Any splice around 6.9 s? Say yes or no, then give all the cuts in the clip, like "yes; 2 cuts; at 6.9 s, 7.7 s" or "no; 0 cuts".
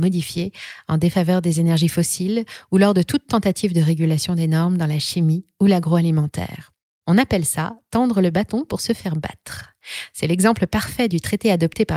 no; 0 cuts